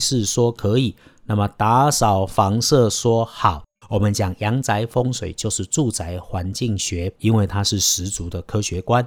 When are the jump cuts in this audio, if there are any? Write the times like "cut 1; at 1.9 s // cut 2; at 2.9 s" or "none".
cut 1; at 3.8 s // cut 2; at 7.2 s